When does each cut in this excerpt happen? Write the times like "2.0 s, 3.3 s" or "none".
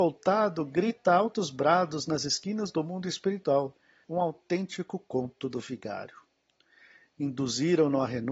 4.0 s